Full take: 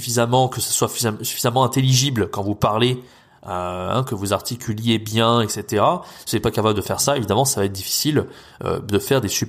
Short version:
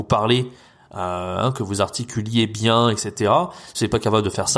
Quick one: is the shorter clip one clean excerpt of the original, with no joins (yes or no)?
yes